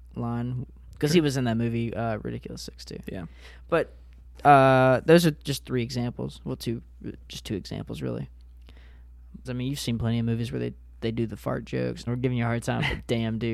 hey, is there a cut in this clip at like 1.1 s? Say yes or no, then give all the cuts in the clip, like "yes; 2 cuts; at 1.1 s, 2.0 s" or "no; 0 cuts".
no; 2 cuts; at 9.4 s, 12.1 s